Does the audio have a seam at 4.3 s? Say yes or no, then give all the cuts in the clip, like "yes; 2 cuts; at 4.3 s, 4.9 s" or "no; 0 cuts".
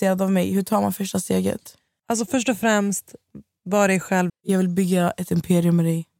yes; 1 cut; at 4.3 s